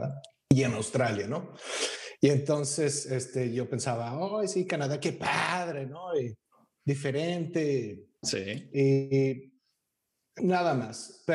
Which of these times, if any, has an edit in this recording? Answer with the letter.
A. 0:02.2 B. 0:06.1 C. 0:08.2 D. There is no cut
C